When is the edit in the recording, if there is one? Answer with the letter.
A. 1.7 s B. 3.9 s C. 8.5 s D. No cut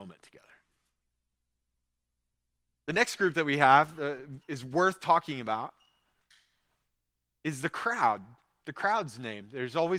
D